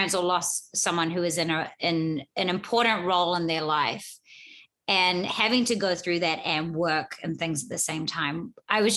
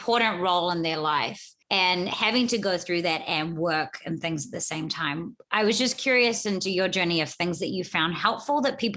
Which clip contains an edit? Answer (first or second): second